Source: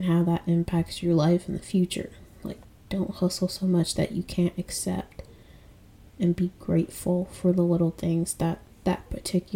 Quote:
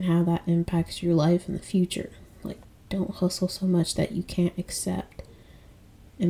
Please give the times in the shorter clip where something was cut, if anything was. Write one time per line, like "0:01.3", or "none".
none